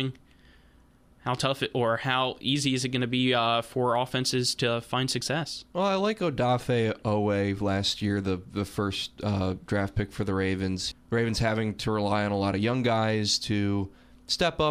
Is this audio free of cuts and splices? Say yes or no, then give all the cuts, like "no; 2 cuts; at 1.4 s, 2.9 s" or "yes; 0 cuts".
no; 1 cut; at 10.9 s